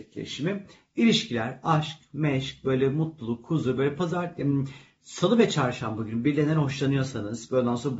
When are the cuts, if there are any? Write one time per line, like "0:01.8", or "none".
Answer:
none